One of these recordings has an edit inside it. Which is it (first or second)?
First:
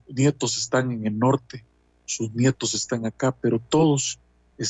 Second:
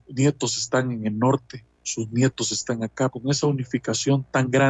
second